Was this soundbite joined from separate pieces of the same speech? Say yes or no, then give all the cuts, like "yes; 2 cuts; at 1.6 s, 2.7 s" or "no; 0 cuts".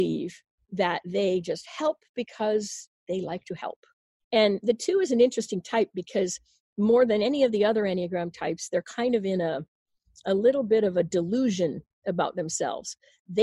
yes; 1 cut; at 4.2 s